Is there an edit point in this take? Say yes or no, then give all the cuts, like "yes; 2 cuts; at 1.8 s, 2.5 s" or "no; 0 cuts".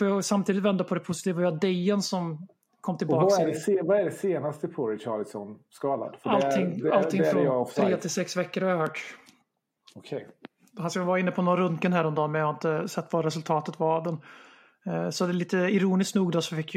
no; 0 cuts